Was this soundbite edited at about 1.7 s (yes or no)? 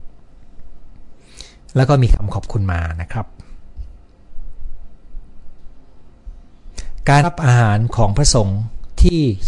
no